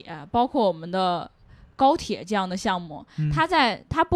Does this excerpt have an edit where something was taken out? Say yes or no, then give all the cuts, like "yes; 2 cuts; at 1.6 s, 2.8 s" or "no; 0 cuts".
no; 0 cuts